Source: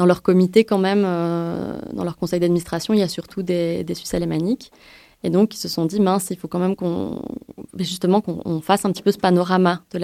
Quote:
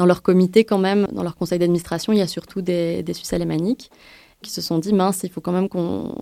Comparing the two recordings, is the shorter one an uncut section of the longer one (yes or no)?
no